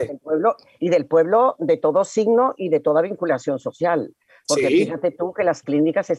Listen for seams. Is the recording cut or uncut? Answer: uncut